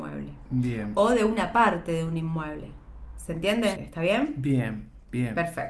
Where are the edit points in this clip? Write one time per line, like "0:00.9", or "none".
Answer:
0:03.7

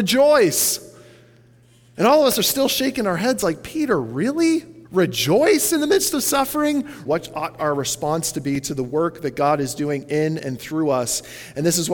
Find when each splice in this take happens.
0:04.8
0:07.1

